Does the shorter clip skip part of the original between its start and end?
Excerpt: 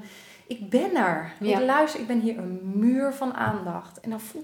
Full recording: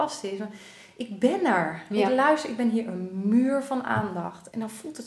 no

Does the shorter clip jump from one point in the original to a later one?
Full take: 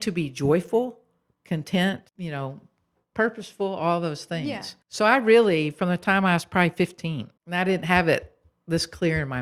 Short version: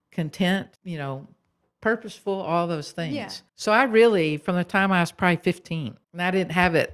no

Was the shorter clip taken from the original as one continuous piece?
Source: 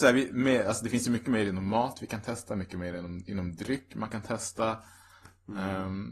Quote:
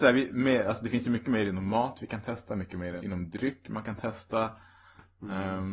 no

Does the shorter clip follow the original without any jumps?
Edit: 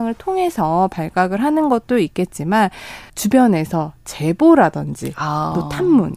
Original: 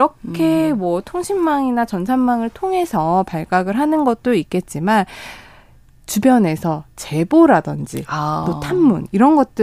no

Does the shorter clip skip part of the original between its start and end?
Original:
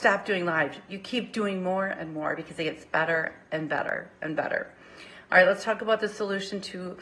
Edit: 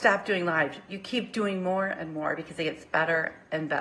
no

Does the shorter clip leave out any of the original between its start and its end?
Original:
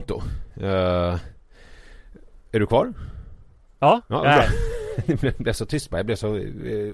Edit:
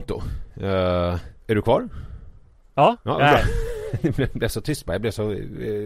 yes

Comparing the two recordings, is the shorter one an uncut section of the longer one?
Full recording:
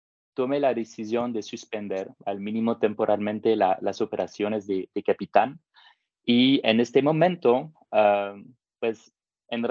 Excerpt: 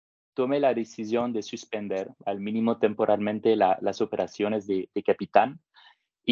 yes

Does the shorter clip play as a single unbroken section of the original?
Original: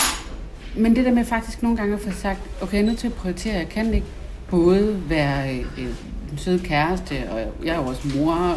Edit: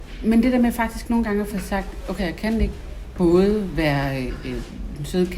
no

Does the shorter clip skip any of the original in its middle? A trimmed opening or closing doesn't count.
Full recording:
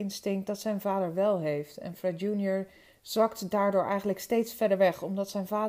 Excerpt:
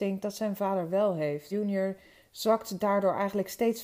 yes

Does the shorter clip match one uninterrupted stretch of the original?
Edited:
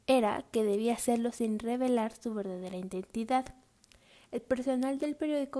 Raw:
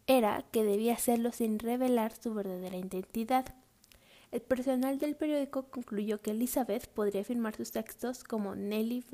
yes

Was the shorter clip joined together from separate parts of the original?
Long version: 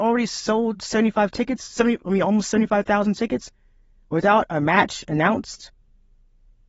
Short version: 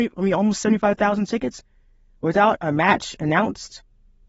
no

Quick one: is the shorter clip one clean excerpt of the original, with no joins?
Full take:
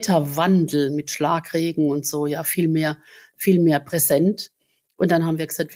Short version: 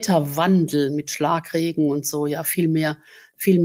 yes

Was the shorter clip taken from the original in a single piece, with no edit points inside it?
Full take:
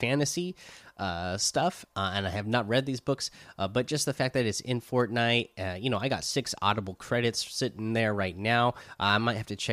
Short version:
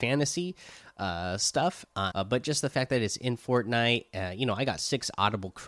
no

